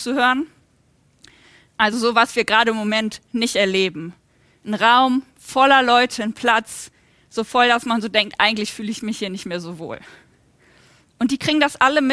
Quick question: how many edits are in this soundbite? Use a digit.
0